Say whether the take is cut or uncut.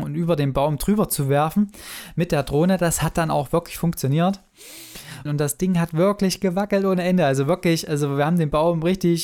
cut